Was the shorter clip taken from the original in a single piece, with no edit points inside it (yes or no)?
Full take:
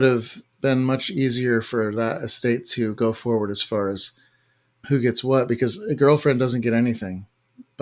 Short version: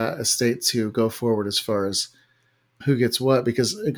yes